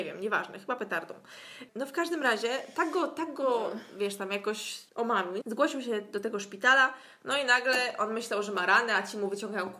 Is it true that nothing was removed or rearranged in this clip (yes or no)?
no